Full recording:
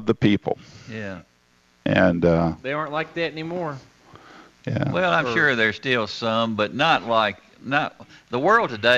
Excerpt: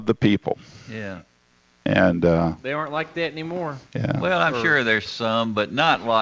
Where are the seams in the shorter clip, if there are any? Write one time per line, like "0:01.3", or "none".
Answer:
0:03.9
0:05.1